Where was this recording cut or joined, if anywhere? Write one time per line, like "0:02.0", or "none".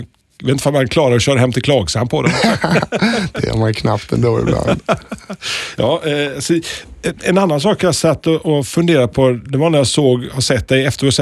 none